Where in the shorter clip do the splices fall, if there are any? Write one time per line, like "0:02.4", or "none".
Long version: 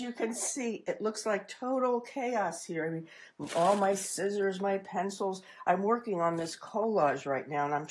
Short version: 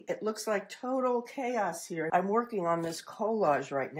0:02.1